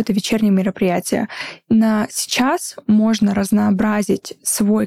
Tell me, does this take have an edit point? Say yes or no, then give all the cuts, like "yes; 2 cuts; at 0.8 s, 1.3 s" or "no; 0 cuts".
yes; 1 cut; at 2.9 s